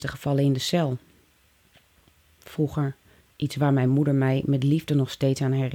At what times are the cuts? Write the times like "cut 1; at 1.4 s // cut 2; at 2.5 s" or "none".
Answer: cut 1; at 3.3 s

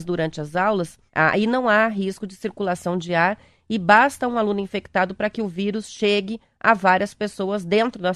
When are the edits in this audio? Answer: cut 1; at 1.1 s

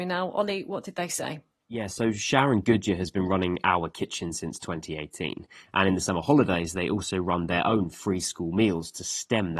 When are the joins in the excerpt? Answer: cut 1; at 5.7 s

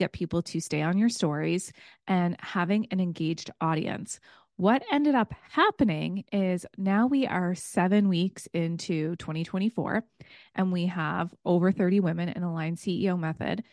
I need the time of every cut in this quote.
none

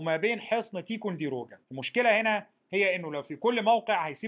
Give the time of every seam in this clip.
cut 1; at 1.6 s

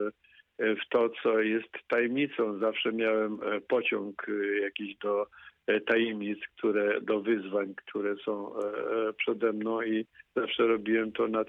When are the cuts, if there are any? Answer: none

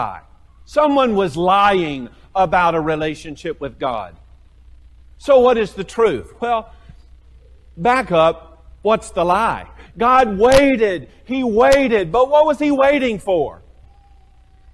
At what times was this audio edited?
cut 1; at 9.9 s

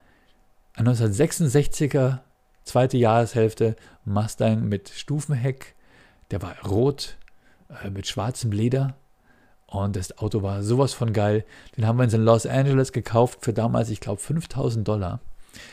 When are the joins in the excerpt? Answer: none

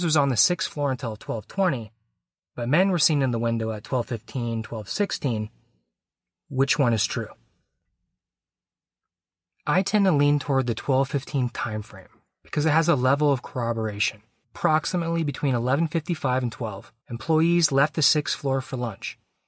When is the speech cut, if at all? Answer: cut 1; at 14.4 s // cut 2; at 17.0 s

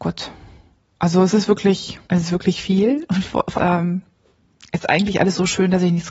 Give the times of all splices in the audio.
cut 1; at 2.0 s // cut 2; at 3.5 s

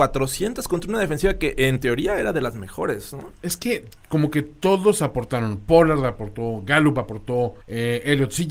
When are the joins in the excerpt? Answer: cut 1; at 7.6 s

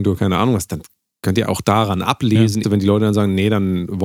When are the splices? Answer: cut 1; at 2.6 s

